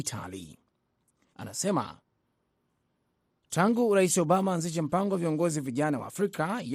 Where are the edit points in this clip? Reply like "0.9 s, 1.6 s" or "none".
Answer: 1.3 s